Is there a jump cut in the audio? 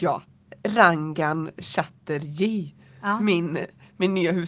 no; 0 cuts

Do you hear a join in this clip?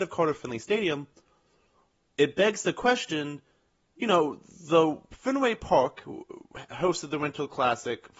no; 0 cuts

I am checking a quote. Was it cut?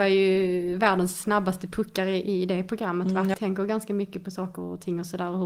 yes; 1 cut; at 3.3 s

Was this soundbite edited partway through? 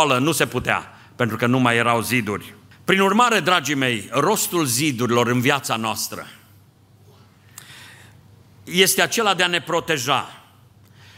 yes; 1 cut; at 2.7 s

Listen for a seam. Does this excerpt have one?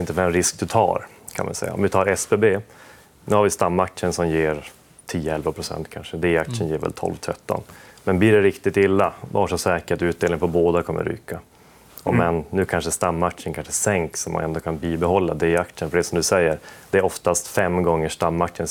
no; 0 cuts

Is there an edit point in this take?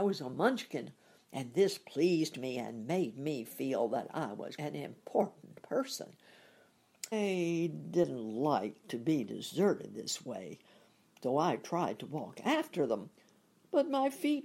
yes; 2 cuts; at 4.6 s, 7.1 s

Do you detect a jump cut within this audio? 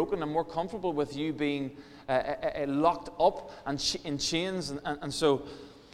no; 0 cuts

